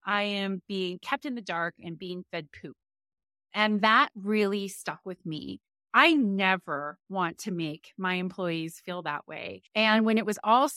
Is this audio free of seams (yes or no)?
no